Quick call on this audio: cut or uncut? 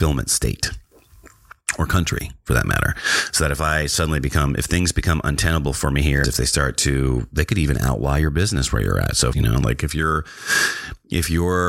cut